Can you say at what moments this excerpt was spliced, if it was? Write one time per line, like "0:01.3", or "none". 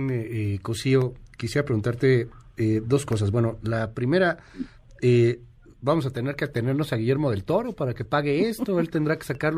none